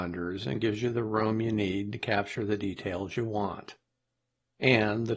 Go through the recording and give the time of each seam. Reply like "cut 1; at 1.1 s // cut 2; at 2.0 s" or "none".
none